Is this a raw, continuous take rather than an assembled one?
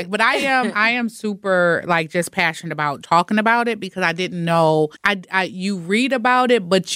no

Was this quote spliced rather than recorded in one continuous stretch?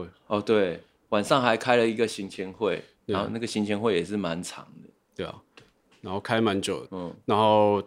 yes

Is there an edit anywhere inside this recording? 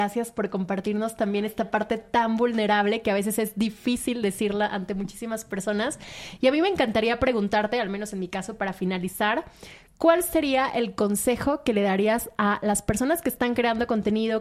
no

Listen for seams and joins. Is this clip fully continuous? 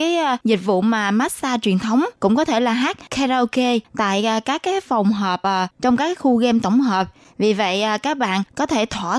yes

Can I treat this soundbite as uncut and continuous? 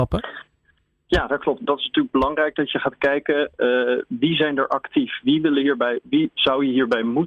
no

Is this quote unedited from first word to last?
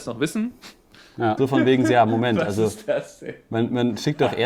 no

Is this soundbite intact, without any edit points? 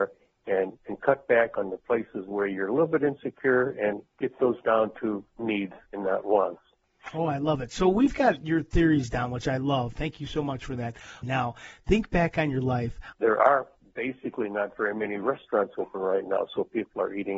no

